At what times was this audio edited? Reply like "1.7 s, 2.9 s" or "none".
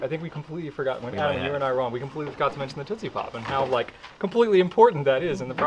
none